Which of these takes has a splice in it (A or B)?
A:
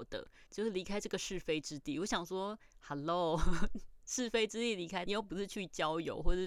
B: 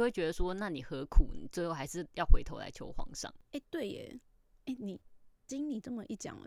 A